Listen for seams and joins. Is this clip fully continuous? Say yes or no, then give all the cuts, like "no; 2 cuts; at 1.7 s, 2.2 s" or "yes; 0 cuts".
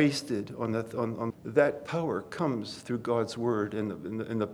no; 1 cut; at 1.3 s